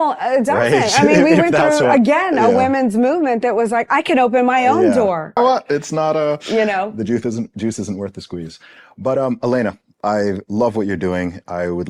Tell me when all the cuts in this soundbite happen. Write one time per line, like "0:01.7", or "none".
0:05.4